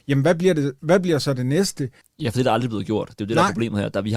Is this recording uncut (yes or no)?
no